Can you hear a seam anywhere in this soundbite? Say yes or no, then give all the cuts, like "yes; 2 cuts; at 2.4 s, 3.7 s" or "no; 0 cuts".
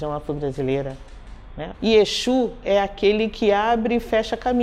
yes; 1 cut; at 1.7 s